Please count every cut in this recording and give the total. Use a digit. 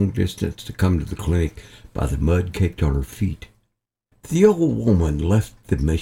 1